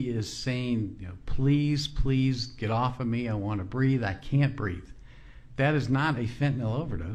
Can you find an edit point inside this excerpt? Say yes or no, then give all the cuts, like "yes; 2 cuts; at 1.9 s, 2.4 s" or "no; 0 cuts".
no; 0 cuts